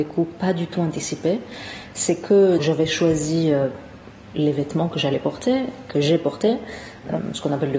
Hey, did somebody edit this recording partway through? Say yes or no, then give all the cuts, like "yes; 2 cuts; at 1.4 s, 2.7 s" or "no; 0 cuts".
yes; 1 cut; at 2.6 s